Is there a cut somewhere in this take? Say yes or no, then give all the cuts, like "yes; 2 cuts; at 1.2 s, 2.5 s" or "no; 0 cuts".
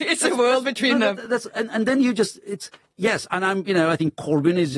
no; 0 cuts